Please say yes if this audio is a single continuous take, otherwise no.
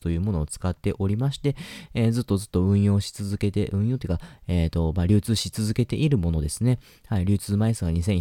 yes